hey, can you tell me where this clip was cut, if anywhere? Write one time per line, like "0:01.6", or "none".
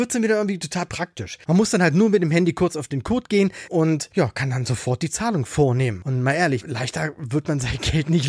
0:06.6